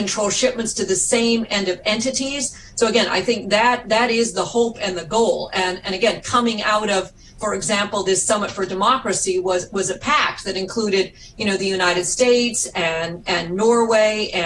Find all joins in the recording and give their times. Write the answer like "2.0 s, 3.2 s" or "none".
none